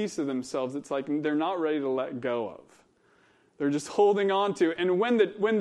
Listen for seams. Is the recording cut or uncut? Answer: uncut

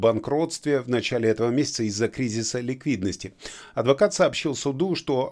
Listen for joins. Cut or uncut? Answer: uncut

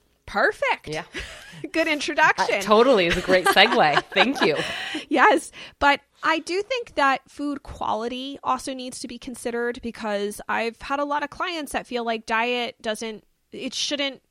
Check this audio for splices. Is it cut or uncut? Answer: uncut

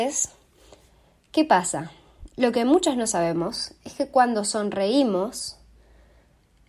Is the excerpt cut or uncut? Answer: uncut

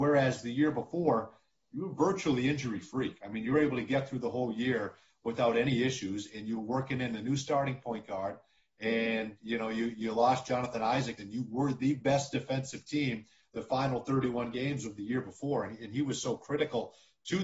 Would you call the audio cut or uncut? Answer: cut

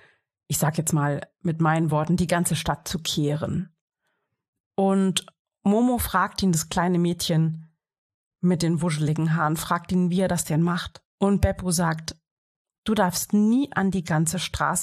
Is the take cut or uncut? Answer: cut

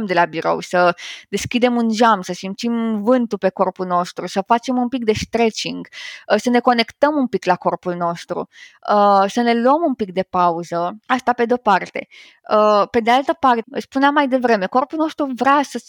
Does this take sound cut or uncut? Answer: cut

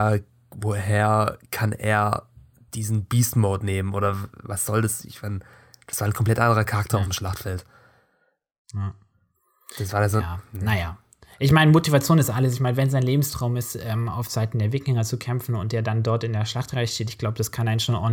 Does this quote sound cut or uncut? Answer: uncut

